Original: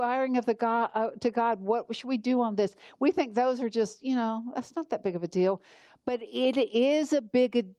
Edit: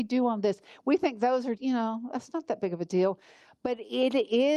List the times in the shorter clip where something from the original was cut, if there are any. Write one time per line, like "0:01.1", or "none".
0:01.6